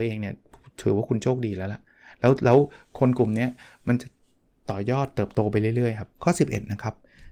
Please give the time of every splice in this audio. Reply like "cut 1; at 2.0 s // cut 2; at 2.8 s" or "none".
cut 1; at 6.1 s